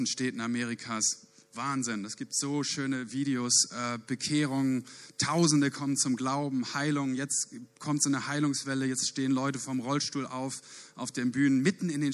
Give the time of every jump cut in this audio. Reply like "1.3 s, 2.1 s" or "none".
none